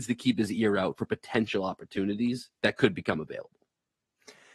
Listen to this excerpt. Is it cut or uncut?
uncut